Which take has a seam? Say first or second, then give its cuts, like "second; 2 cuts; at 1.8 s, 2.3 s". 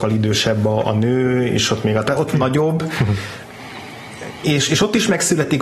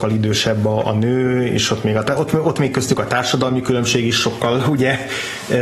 first; 1 cut; at 2.3 s